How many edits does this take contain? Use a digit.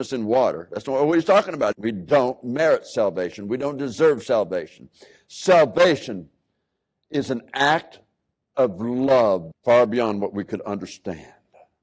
2